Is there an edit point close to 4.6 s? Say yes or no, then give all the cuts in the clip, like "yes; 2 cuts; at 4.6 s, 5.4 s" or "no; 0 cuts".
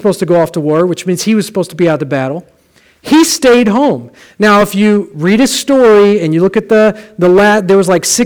no; 0 cuts